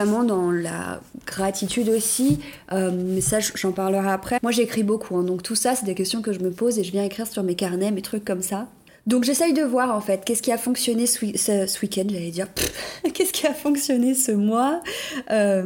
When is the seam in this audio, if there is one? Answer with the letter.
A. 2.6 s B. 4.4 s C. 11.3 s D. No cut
B